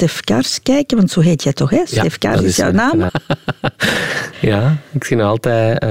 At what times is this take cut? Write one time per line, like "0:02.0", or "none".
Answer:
0:03.1